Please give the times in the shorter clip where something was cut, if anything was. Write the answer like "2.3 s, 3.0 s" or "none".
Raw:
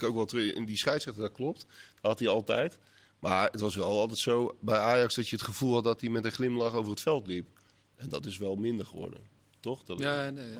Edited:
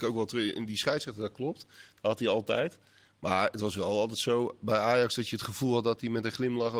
none